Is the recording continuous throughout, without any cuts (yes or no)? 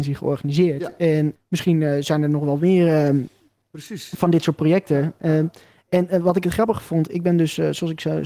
no